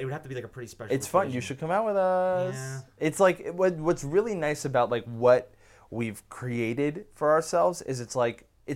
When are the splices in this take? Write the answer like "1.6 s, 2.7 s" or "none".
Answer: none